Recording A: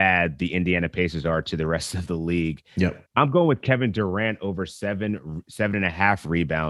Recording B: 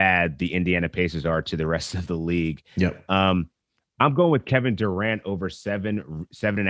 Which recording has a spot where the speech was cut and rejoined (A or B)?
A